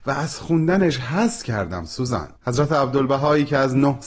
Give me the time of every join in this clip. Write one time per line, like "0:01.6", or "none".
0:02.4